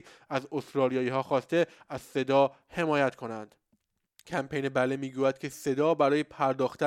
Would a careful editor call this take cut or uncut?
uncut